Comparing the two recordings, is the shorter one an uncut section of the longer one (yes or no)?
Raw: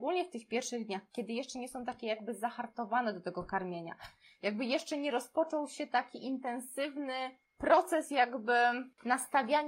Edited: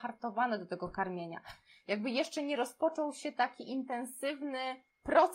yes